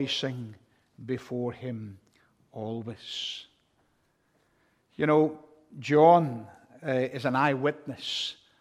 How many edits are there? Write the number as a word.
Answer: zero